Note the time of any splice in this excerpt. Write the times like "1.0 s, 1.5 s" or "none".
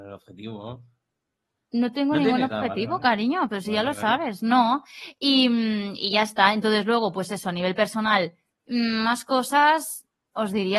none